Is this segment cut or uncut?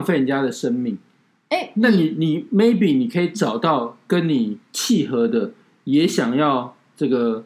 uncut